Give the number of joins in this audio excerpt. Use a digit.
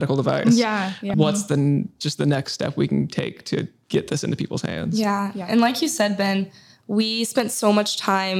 1